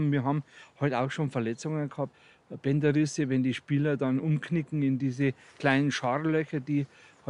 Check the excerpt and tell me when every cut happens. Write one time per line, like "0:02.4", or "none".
none